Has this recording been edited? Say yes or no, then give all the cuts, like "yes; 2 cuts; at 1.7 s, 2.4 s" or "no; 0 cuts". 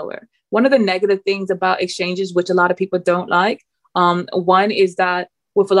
no; 0 cuts